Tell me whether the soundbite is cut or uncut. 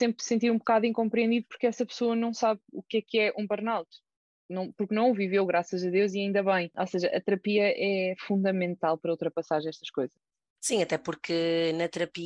uncut